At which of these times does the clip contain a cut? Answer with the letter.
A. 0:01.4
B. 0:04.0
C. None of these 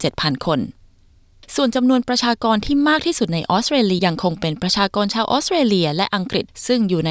B